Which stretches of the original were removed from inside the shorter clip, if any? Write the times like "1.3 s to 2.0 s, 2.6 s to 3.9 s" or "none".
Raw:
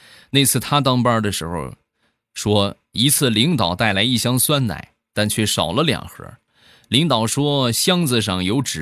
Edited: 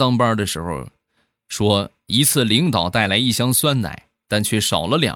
none